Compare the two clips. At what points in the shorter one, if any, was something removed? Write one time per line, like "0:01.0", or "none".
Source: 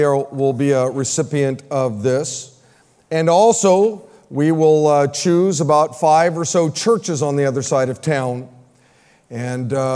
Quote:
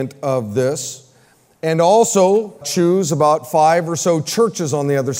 0:02.6